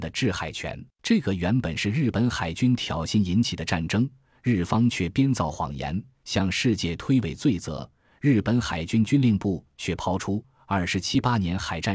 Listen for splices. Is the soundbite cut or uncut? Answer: cut